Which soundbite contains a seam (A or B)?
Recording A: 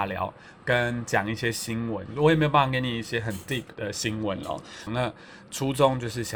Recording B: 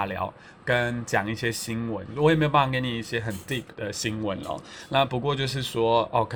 A